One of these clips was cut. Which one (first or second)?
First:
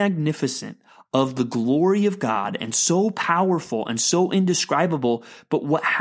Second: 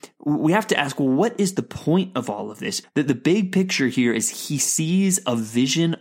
second